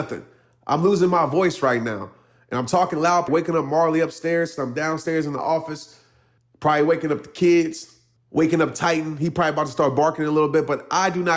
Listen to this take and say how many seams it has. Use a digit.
1